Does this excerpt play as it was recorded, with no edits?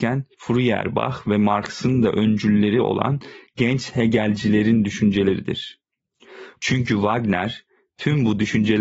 no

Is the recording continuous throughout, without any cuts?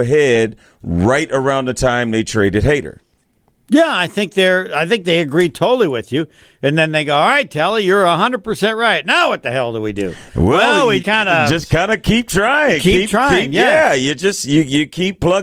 no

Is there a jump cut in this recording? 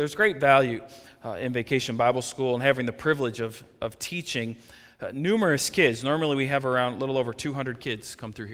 no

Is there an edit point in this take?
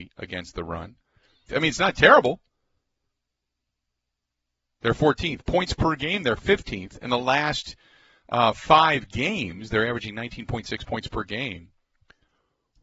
yes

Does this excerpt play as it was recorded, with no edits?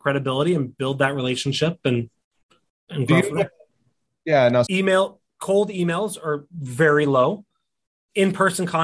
no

